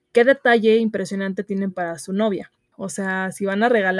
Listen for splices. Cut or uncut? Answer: cut